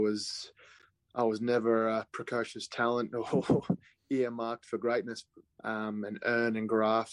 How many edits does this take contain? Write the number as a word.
one